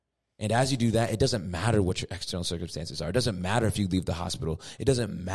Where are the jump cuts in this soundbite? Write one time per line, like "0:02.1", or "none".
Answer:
none

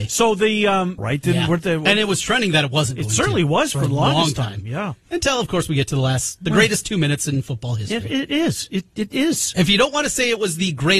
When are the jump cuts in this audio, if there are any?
0:01.0

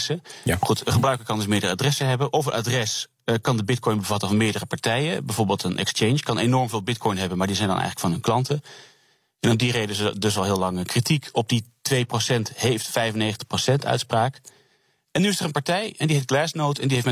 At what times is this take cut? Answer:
none

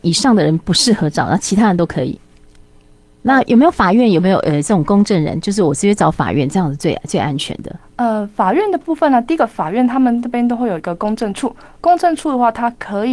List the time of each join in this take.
none

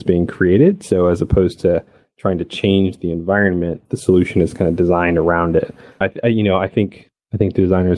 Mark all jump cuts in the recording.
0:03.9
0:06.0

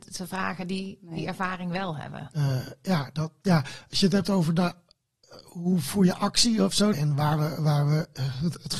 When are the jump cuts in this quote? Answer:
0:02.3
0:06.9

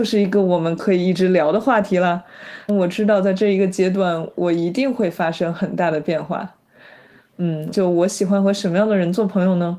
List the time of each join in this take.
0:02.7
0:07.7

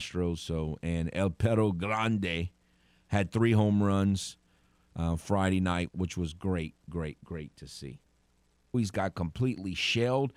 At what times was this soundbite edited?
0:05.9
0:08.7

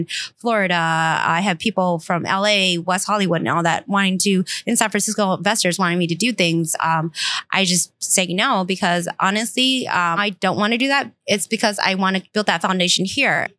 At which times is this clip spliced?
0:10.2

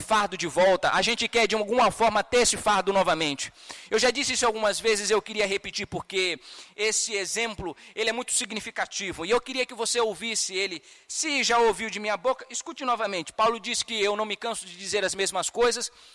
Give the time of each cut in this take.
none

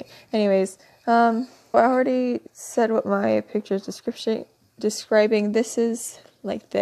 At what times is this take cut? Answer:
0:01.7

